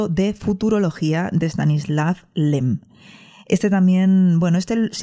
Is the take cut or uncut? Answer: uncut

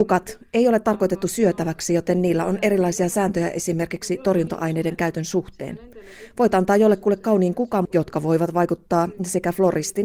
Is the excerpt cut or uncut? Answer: cut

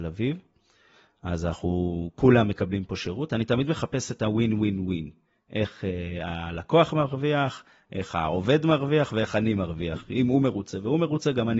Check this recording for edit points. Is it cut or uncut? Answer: uncut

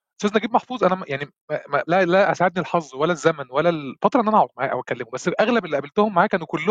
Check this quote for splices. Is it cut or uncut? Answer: cut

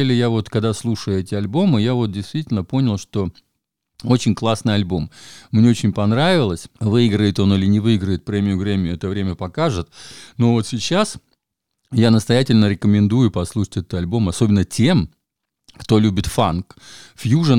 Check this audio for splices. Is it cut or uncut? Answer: cut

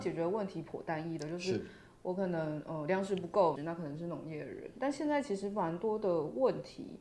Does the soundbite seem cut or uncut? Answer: cut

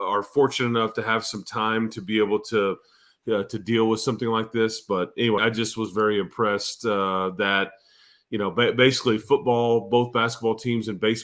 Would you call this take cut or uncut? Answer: cut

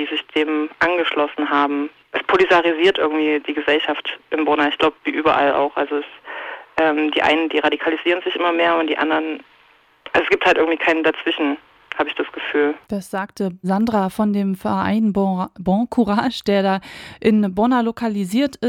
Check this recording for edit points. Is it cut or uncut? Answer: cut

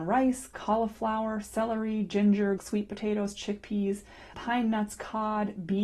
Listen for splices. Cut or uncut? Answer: cut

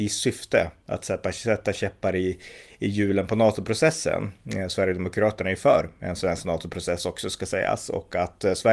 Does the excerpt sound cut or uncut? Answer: uncut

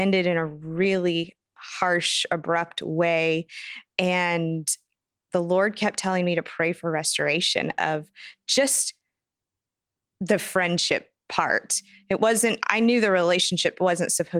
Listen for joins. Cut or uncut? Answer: uncut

